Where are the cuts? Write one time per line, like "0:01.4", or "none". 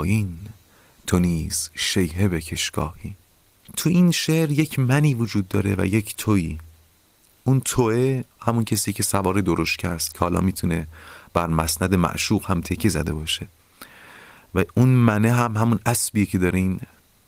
0:08.3

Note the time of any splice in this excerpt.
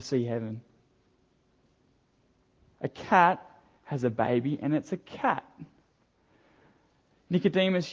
0:02.7

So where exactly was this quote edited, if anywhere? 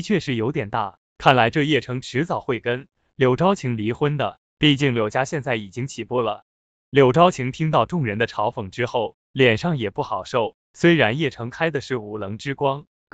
0:01.1

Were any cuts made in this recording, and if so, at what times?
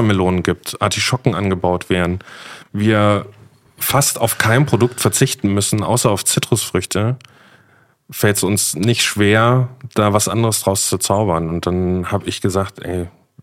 none

